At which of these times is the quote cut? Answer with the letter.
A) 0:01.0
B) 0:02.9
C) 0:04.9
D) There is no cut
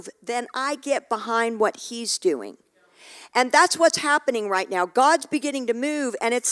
D